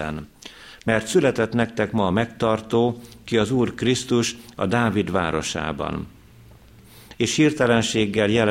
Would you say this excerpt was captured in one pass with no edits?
no; 1 cut; at 7.1 s

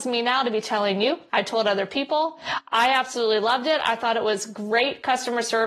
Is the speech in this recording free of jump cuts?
yes; 0 cuts

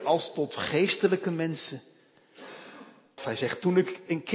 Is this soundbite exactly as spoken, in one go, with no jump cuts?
no; 1 cut; at 3.2 s

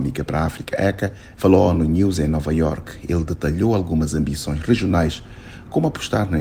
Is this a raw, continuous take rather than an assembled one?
no; 1 cut; at 1.4 s

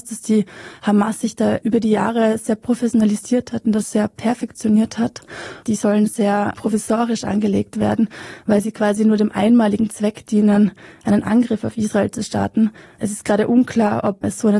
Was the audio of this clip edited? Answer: yes; 1 cut; at 5.6 s

